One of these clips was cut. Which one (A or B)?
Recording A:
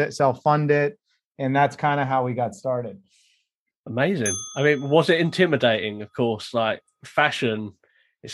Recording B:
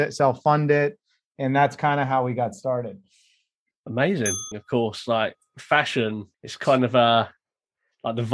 B